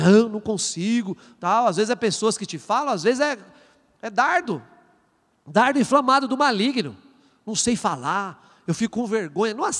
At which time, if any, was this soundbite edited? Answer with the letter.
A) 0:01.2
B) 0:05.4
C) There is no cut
C